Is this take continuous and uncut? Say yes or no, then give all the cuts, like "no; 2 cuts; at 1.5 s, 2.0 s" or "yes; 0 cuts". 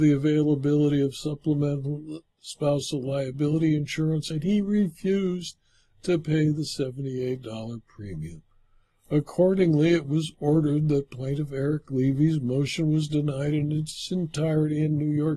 no; 1 cut; at 2.3 s